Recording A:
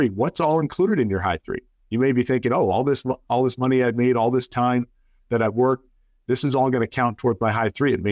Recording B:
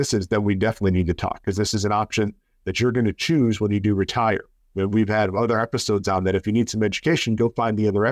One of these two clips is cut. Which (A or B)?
A